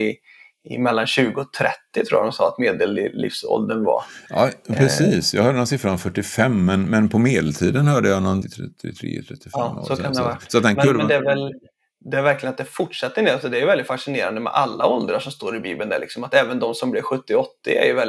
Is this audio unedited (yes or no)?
no